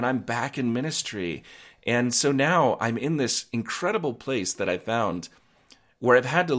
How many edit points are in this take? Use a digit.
0